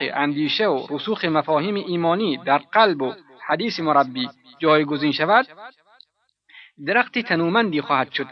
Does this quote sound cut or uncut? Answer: uncut